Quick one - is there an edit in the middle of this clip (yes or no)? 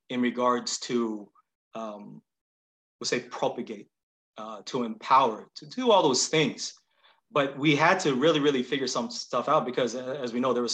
no